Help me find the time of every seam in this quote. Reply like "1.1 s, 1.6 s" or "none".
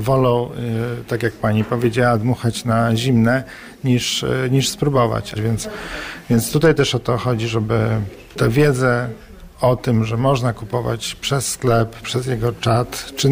5.3 s, 12.0 s